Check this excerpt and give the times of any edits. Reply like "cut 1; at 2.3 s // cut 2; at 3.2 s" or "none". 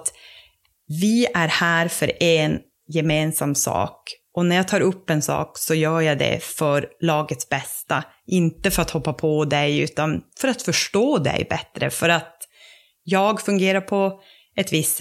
none